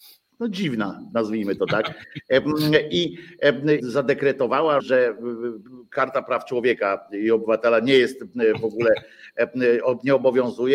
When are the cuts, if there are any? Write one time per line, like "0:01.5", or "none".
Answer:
0:03.8
0:04.8